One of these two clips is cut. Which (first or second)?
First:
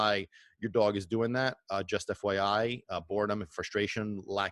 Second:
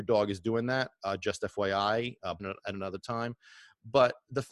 second